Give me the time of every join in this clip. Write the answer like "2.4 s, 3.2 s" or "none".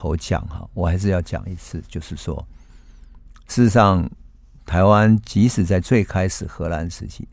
none